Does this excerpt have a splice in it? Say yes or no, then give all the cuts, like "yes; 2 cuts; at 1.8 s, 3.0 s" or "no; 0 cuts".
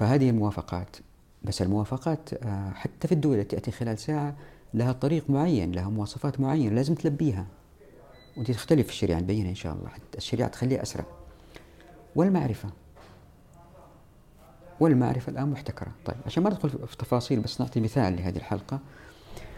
yes; 1 cut; at 16.0 s